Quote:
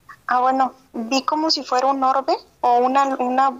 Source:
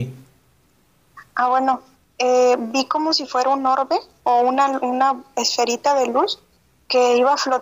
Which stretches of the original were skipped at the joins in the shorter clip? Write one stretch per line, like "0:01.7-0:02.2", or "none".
0:02.0-0:02.6

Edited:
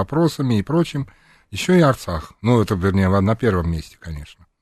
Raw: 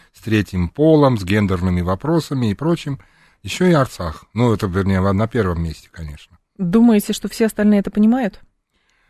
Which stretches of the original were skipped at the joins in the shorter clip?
none

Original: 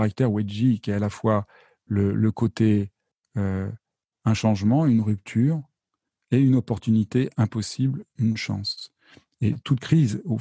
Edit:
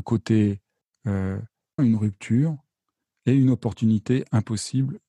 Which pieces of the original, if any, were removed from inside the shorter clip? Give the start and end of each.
0:04.1-0:04.8

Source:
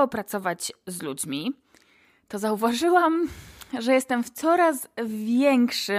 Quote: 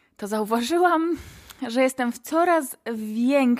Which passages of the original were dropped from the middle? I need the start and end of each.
none

